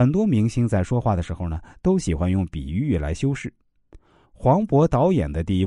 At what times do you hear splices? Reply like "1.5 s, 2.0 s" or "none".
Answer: 4.2 s

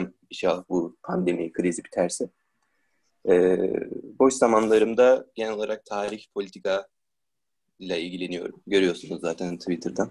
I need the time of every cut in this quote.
none

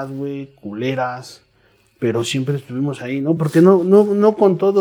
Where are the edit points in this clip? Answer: none

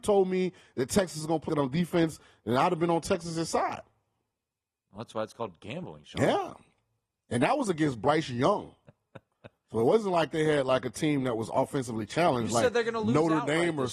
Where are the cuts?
1.5 s

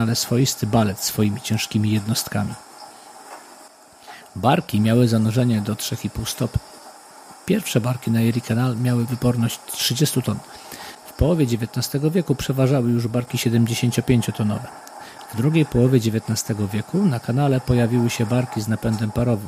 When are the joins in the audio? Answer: 15.3 s

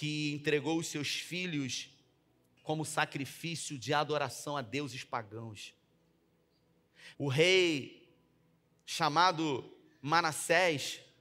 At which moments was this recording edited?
2.6 s, 7.1 s

